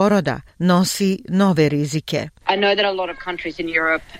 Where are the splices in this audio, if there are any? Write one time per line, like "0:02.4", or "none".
0:02.4

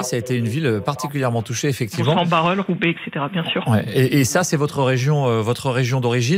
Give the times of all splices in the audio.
none

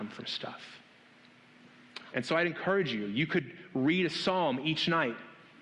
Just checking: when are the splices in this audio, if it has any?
0:02.1

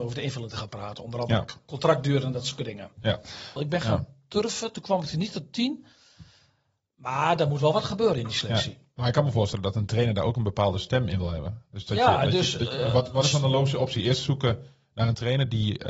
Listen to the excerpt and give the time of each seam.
0:03.6

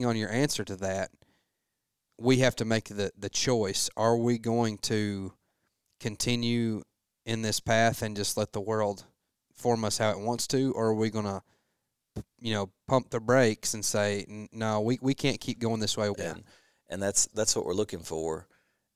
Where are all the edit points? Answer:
0:16.1
0:17.3

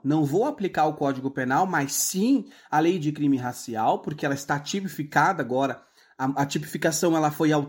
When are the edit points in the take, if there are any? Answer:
none

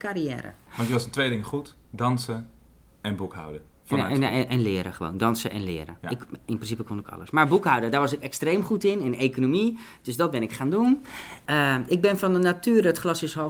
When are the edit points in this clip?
none

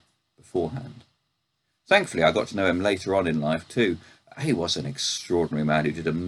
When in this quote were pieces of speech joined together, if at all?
none

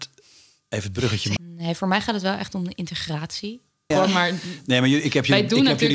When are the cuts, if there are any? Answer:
0:01.4
0:03.9

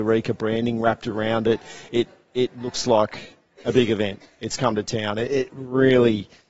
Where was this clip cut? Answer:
none

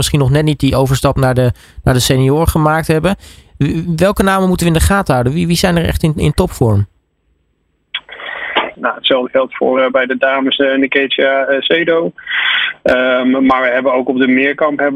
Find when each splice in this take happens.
0:08.7

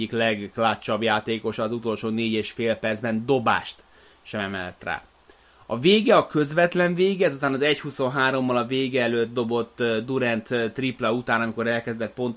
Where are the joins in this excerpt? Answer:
none

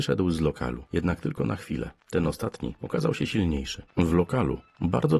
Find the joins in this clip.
0:02.0
0:03.9

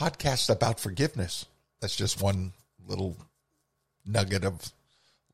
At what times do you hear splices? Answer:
0:01.8

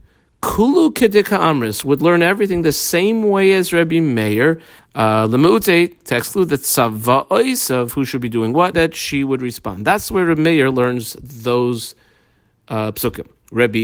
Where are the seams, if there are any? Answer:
0:04.8
0:08.7

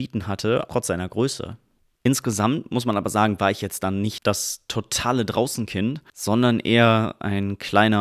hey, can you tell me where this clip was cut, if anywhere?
none

